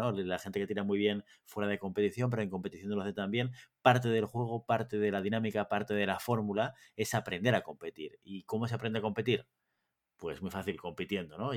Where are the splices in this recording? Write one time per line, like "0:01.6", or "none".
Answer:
none